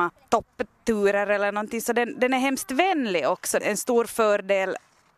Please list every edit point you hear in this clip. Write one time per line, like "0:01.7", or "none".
0:03.6